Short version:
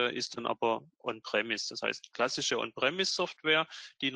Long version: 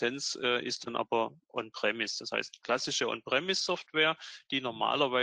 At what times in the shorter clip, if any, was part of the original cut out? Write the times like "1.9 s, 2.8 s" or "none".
none